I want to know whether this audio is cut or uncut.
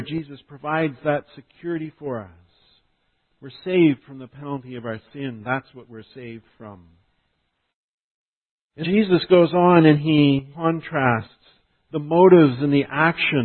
cut